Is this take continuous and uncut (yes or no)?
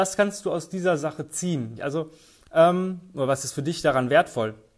no